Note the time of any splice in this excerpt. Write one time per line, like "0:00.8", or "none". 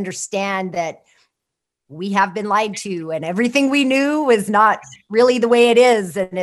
none